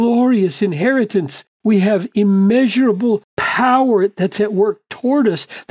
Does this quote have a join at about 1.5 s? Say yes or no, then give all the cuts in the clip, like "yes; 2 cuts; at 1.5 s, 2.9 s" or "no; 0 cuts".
yes; 2 cuts; at 1.5 s, 3.3 s